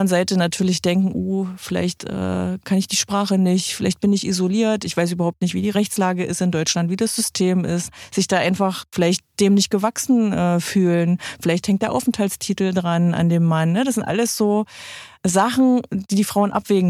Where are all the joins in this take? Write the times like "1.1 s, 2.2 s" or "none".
none